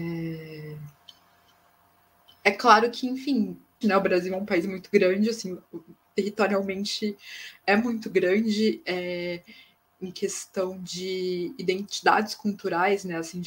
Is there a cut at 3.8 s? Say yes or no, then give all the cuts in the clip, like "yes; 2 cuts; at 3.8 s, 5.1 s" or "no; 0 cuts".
yes; 1 cut; at 3.8 s